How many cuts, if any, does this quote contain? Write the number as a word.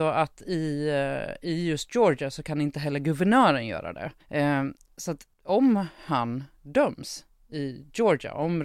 two